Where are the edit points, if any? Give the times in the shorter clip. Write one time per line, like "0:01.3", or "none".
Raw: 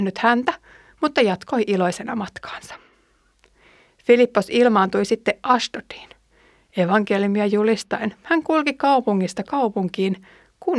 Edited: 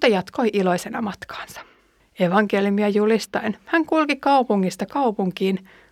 0:02.0